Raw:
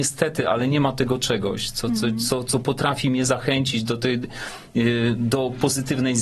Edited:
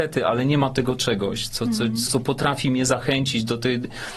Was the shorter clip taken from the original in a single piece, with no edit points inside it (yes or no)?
no